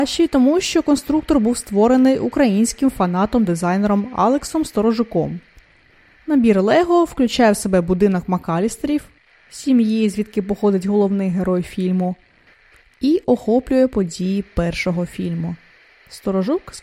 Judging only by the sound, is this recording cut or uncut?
uncut